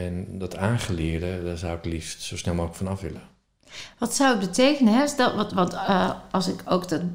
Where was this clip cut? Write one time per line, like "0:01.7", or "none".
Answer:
none